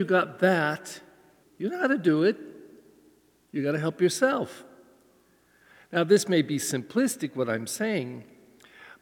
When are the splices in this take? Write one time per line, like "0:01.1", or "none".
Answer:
0:01.4